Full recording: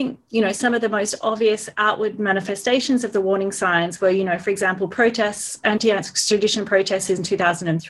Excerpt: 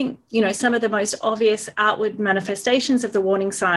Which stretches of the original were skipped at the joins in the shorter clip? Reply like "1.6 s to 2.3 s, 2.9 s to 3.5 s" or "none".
none